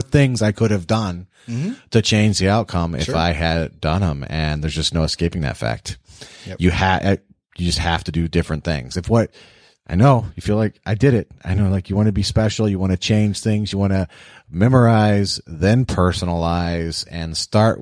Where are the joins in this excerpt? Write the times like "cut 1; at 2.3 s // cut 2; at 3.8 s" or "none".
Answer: none